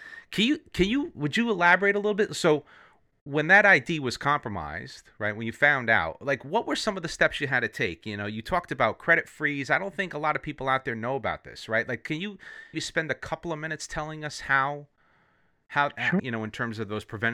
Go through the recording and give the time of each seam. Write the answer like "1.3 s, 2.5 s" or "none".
12.7 s, 16.2 s